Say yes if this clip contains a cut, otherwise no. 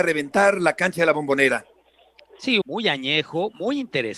yes